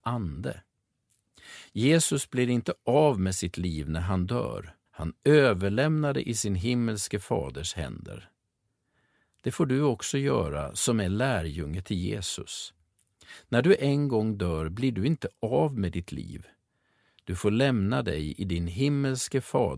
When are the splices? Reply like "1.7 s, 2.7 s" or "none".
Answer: 4.9 s